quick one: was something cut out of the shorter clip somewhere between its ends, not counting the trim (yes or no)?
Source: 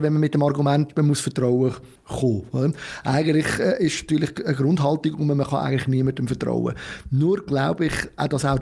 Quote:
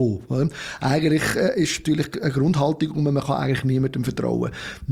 no